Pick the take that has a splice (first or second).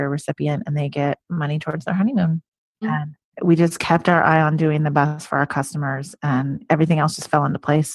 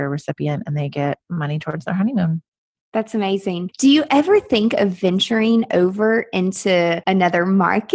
first